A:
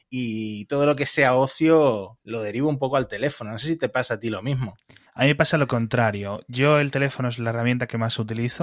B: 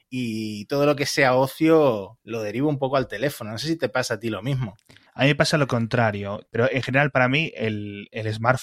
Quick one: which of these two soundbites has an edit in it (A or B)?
B